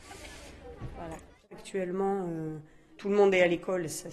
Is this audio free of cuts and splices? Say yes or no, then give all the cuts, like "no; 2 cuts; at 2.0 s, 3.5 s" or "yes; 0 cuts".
yes; 0 cuts